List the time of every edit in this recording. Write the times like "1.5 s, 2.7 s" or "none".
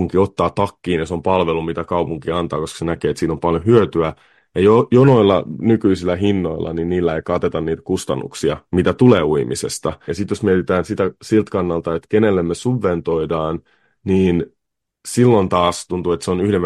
10.1 s